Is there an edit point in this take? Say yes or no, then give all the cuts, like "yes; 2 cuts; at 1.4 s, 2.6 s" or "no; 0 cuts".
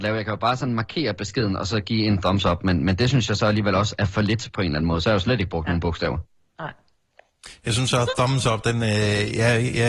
no; 0 cuts